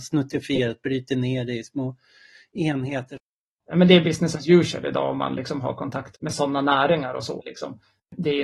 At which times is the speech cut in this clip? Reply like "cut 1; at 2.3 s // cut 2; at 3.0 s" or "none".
cut 1; at 6.1 s // cut 2; at 7.4 s